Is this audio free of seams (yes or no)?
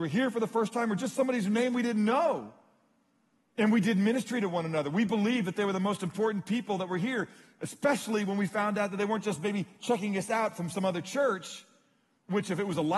no